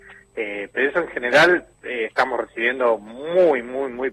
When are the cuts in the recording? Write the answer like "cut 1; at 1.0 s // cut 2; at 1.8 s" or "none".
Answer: none